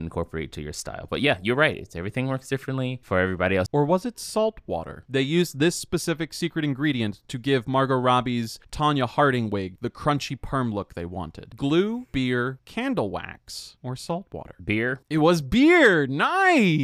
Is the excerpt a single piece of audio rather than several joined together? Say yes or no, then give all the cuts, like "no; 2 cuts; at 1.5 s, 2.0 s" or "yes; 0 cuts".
no; 1 cut; at 3.7 s